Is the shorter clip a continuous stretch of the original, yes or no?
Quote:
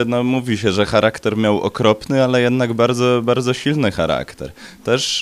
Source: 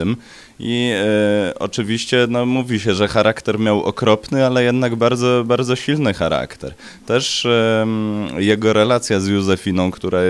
yes